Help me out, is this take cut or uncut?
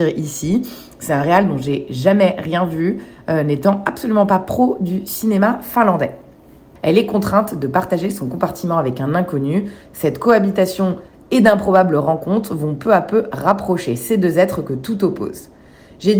cut